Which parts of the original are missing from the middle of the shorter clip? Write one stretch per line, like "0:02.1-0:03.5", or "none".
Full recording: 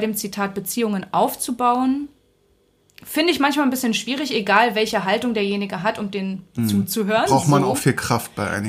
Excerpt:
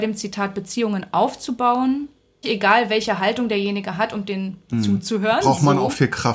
0:02.4-0:04.3